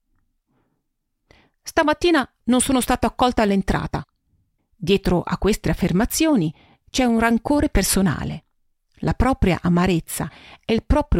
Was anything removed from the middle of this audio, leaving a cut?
yes; 1 cut; at 4.6 s

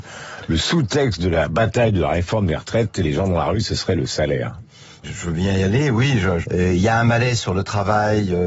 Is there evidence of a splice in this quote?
yes; 2 cuts; at 5.0 s, 6.4 s

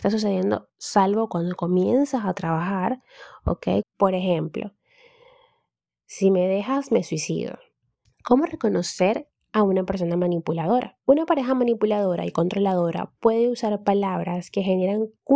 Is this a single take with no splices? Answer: no; 3 cuts; at 3.8 s, 8.1 s, 11.0 s

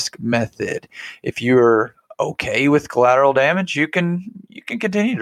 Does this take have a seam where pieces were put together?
no; 0 cuts

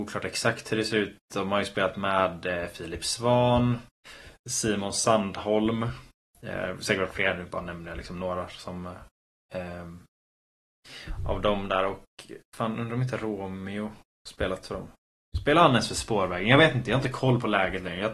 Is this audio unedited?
yes; 0 cuts

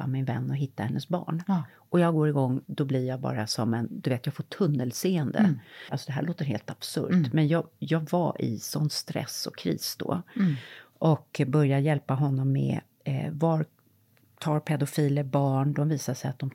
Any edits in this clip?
yes; 2 cuts; at 2.7 s, 5.9 s

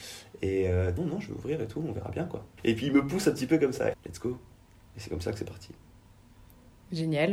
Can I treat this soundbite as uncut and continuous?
no; 3 cuts; at 1.0 s, 2.6 s, 3.9 s

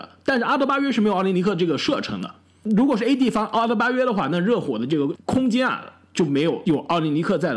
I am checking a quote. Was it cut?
no; 0 cuts

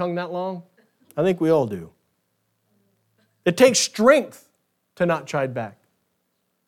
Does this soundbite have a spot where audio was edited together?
no; 0 cuts

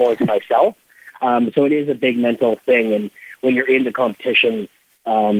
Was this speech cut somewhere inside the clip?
no; 0 cuts

